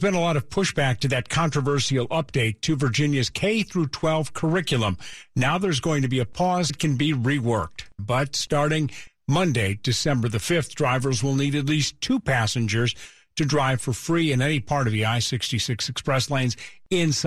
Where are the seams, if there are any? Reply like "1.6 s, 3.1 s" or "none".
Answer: 6.7 s, 8.0 s